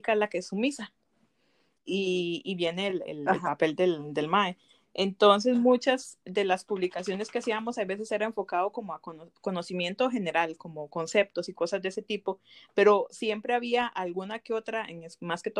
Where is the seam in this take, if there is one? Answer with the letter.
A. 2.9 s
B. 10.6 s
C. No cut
C